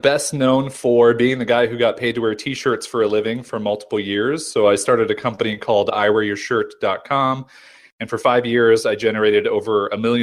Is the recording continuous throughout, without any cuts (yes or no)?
yes